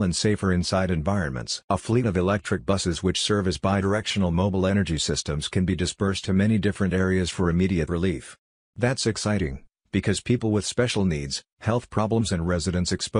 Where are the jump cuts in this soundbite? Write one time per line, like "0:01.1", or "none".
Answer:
0:01.7